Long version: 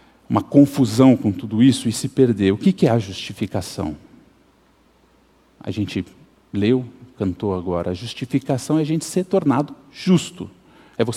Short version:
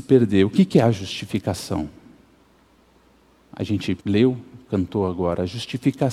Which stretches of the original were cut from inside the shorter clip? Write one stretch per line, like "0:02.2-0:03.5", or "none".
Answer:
0:06.1-0:06.5